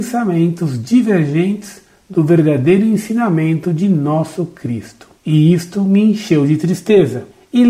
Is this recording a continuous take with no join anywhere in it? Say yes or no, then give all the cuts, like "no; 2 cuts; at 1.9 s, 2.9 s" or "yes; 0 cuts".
yes; 0 cuts